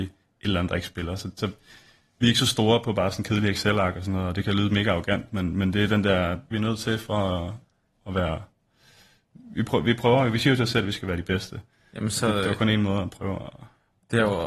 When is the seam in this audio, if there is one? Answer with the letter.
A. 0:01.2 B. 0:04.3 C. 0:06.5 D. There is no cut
C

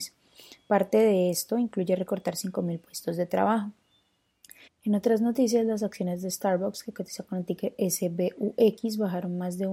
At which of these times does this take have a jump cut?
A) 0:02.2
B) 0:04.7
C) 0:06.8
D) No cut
B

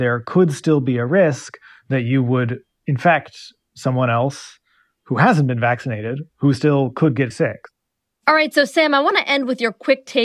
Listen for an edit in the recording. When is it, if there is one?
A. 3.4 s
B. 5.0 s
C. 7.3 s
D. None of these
C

